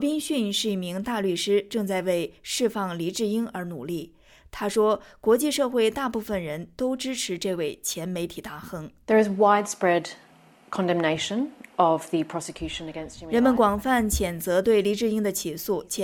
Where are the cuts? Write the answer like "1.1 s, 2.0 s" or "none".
none